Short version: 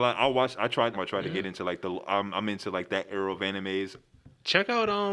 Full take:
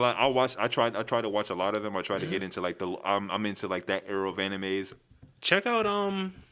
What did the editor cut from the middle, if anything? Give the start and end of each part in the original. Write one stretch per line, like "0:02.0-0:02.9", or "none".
0:00.9-0:01.9